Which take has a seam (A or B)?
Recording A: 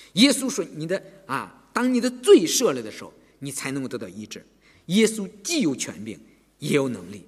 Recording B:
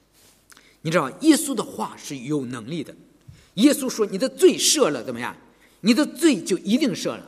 A